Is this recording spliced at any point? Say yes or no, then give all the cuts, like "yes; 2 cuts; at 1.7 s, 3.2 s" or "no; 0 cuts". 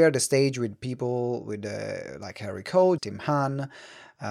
yes; 1 cut; at 3.0 s